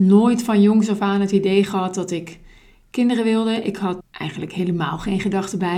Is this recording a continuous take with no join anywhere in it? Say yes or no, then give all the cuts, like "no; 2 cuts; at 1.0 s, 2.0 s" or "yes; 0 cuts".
no; 1 cut; at 4.0 s